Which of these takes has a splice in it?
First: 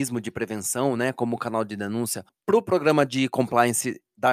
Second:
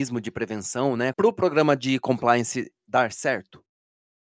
second; 1 cut; at 1.1 s

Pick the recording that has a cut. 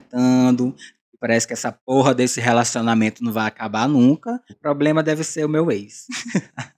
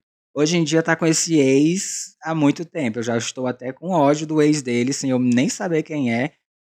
first; 2 cuts; at 1.0 s, 4.5 s

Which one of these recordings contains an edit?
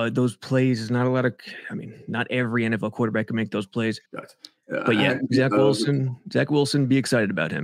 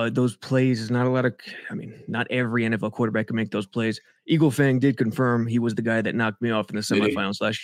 first; 1 cut; at 4.0 s

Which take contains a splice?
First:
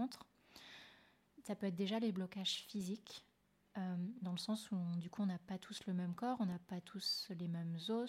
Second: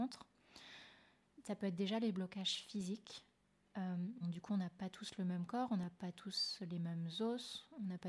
second; 1 cut; at 4.2 s

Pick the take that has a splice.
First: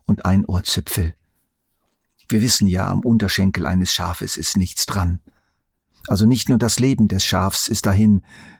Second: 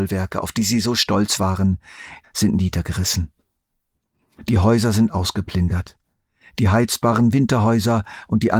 second; 1 cut; at 2.2 s

